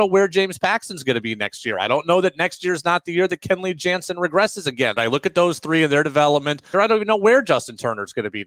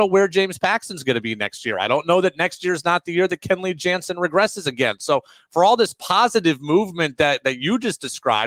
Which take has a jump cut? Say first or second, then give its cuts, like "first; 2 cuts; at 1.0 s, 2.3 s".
first; 2 cuts; at 5.0 s, 6.7 s